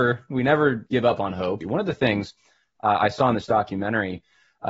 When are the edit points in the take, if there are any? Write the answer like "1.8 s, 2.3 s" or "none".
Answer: 1.6 s